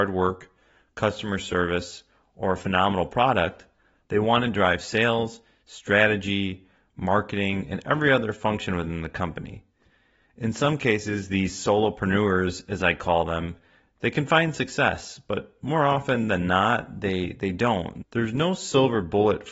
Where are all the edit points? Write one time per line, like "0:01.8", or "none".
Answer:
0:04.0
0:18.0